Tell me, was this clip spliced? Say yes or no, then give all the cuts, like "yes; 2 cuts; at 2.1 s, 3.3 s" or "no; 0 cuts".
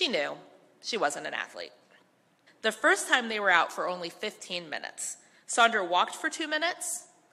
yes; 1 cut; at 2.5 s